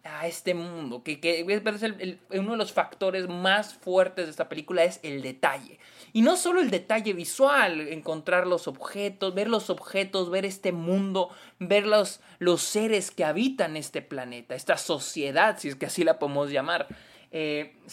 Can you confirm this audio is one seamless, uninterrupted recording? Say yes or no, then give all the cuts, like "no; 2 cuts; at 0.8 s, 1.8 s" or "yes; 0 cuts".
yes; 0 cuts